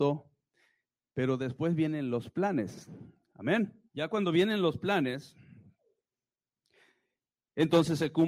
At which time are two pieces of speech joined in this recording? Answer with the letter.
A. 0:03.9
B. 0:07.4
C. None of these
A